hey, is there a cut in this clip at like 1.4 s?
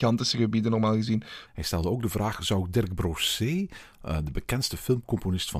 yes; 1 cut; at 1.4 s

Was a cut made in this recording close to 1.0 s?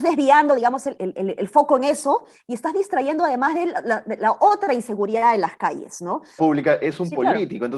yes; 2 cuts; at 1.0 s, 6.4 s

